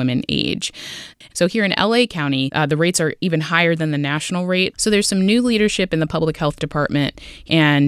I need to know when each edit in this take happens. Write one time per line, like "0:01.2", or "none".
0:01.2
0:04.7